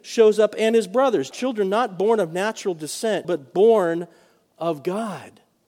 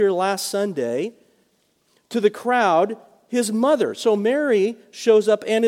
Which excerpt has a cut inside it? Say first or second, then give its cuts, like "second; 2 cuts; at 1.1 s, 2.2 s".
first; 2 cuts; at 1.3 s, 3.2 s